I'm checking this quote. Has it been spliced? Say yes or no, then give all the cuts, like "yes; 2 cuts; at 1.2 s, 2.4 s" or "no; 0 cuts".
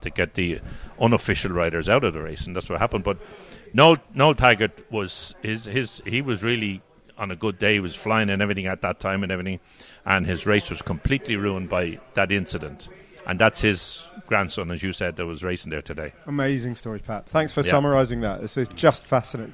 no; 0 cuts